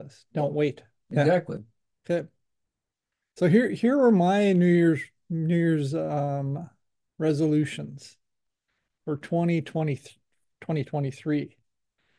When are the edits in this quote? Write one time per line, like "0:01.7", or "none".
none

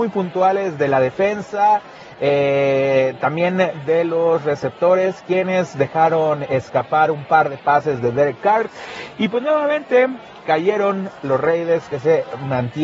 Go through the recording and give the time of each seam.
none

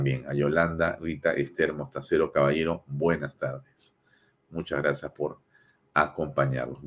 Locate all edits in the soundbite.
none

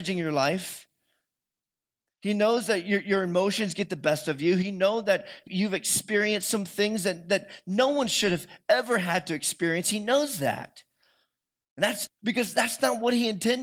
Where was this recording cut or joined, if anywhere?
0:05.5
0:12.1

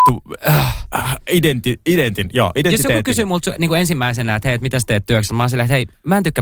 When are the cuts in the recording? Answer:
none

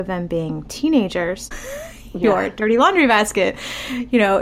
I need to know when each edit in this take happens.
0:01.5

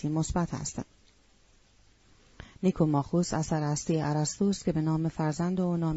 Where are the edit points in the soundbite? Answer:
none

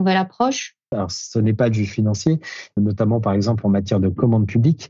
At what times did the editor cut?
0:00.9
0:02.8

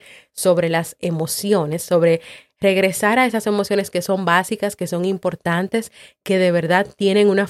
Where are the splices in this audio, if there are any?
none

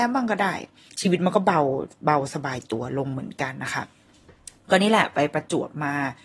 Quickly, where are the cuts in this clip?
none

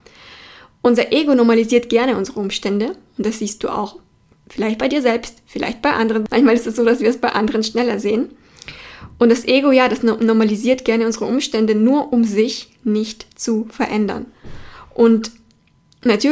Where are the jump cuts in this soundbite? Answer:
none

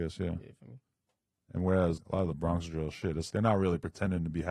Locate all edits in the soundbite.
0:02.0
0:03.3

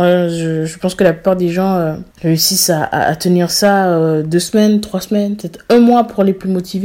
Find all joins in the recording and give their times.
0:02.1

